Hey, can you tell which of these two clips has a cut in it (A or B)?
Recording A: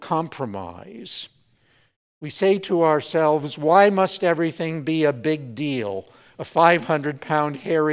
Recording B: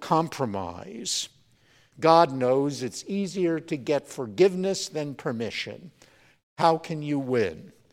B